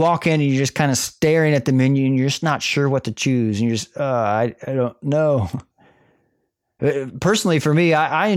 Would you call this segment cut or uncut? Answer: uncut